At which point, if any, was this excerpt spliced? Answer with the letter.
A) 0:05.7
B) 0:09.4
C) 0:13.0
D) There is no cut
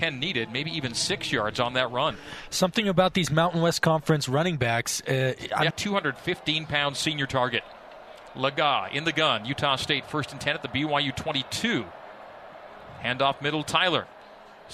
A